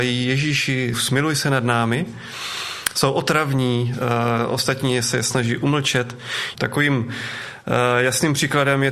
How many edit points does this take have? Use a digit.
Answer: 2